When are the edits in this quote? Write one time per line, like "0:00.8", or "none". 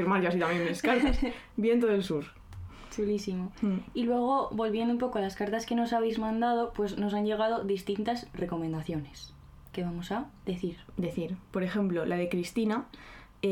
none